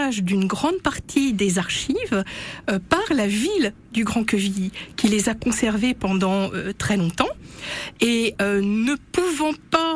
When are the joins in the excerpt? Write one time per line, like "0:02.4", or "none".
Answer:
none

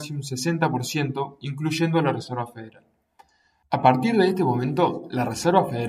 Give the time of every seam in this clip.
0:03.6

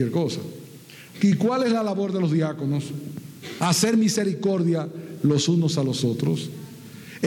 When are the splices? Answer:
0:01.1
0:03.6

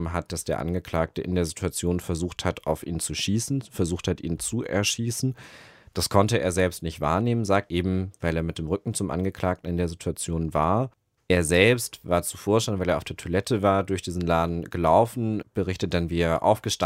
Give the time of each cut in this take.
0:07.7
0:11.2

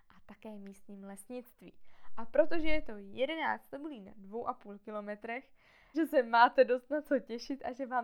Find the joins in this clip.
0:05.9

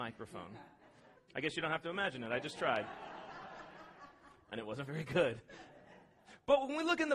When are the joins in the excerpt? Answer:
0:01.2

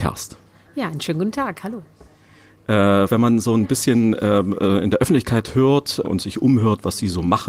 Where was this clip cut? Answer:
0:03.1
0:06.0

